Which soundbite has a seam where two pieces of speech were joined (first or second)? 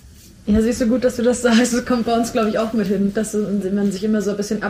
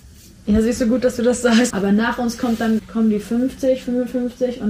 second